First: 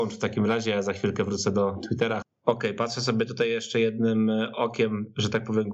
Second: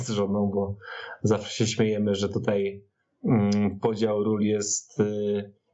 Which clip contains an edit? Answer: first; 1 cut; at 2.2 s

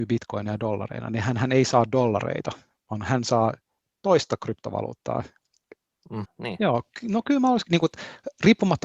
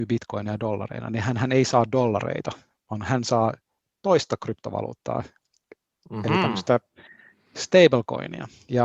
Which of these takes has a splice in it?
first; 2 cuts; at 6.2 s, 7.7 s

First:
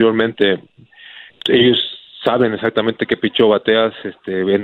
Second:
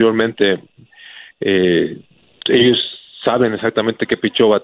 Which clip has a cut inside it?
first; 1 cut; at 1.3 s

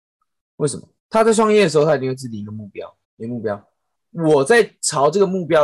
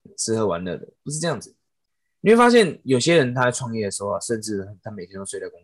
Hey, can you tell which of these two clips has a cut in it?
first; 2 cuts; at 1.0 s, 3.0 s

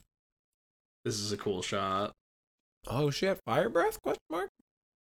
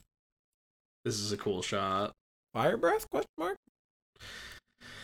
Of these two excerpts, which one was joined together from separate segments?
second; 1 cut; at 2.5 s

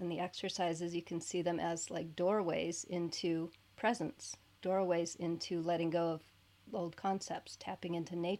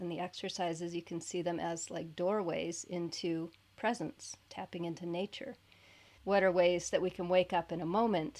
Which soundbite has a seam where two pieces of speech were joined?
second; 2 cuts; at 4.5 s, 6.2 s

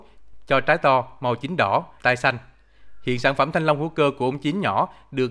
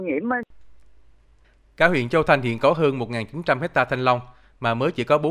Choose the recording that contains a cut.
first; 1 cut; at 2.0 s

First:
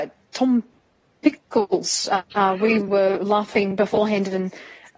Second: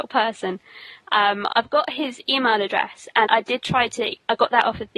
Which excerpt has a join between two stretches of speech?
second; 1 cut; at 3.3 s

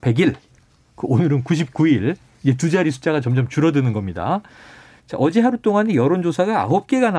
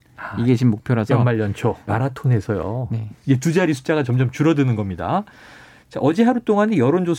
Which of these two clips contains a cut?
second; 2 cuts; at 1.9 s, 3.1 s

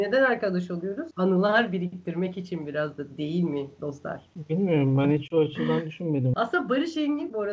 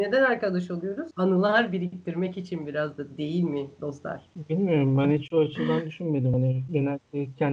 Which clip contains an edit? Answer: first; 1 cut; at 6.3 s

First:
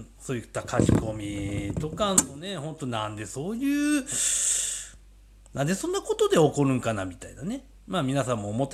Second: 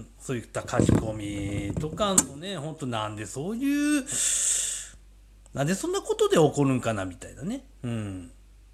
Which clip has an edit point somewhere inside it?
first; 1 cut; at 7.7 s

